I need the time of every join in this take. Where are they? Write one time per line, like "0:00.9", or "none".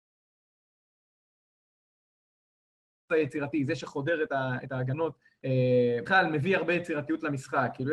none